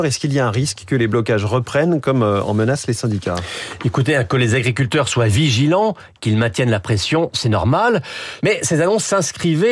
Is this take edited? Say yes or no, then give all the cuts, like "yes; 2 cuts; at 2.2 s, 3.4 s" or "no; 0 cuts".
yes; 1 cut; at 8.4 s